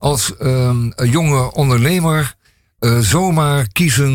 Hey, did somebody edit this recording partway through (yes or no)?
no